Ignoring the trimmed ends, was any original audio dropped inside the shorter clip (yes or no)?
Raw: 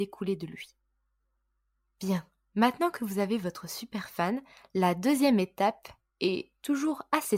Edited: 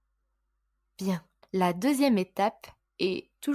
yes